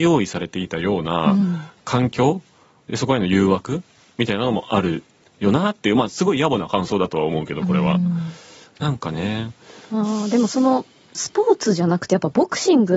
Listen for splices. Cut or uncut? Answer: uncut